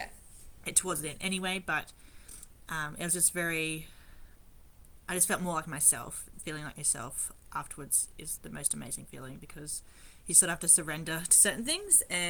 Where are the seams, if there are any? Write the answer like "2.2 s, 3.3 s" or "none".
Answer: 6.3 s, 8.4 s